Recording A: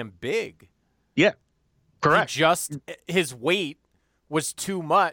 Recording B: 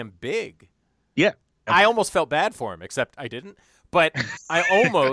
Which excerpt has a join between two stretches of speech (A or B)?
B